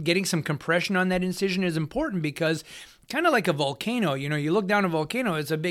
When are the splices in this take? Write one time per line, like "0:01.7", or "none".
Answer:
none